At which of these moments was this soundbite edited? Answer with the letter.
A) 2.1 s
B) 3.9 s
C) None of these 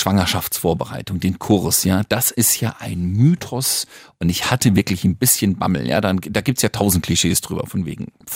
C